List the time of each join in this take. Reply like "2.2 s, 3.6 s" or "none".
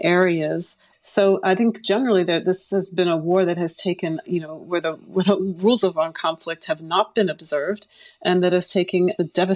0.9 s, 4.2 s